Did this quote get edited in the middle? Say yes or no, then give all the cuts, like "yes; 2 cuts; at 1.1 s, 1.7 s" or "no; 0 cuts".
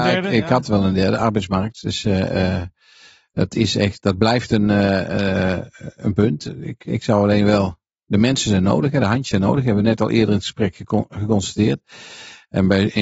no; 0 cuts